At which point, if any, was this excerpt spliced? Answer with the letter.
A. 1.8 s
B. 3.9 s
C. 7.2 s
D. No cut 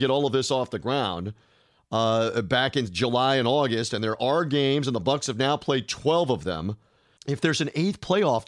C